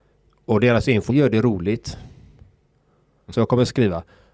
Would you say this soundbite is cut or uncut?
cut